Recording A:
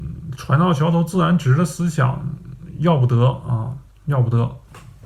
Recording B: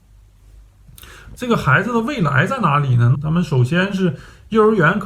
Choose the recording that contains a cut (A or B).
B